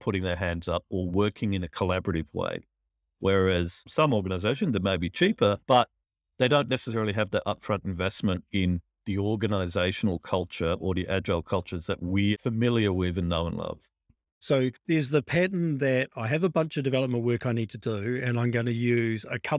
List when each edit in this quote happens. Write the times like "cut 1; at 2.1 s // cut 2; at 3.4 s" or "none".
cut 1; at 14.3 s